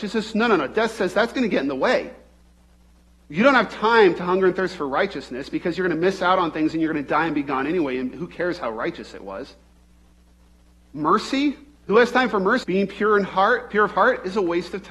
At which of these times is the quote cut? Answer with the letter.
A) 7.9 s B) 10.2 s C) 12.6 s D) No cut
C